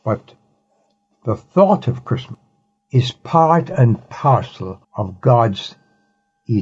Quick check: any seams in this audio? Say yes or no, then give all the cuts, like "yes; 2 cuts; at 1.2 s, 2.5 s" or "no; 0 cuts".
yes; 2 cuts; at 2.8 s, 4.8 s